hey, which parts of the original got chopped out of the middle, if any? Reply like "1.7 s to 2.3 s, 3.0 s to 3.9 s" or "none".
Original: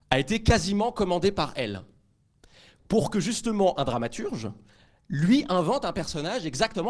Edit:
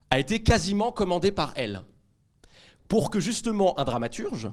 none